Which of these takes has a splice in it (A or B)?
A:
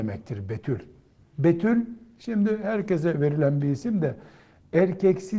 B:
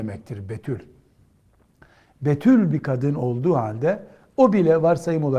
A